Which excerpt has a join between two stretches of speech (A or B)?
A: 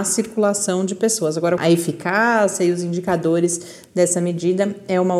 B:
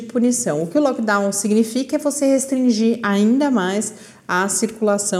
A